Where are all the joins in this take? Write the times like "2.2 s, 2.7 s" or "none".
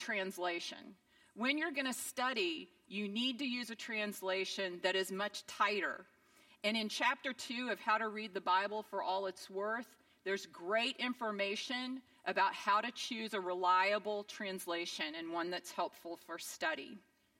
none

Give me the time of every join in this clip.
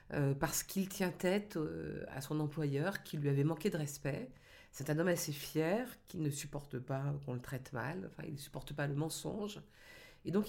none

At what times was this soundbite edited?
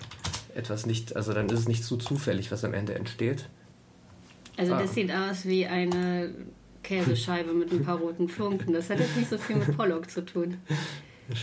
none

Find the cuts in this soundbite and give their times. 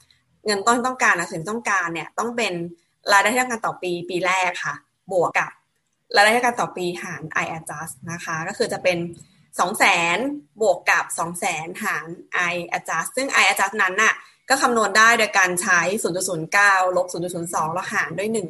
5.3 s

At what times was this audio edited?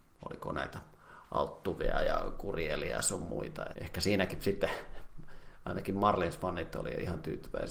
3.7 s

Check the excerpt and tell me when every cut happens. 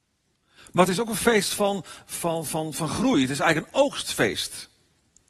none

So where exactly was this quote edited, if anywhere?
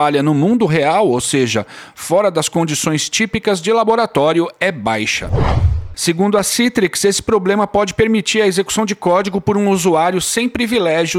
5.9 s

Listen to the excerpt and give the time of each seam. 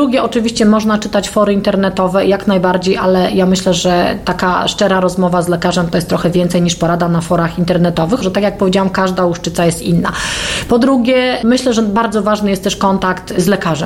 8.2 s

